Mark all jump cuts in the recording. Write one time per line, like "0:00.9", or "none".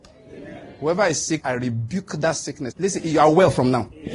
0:01.4
0:02.7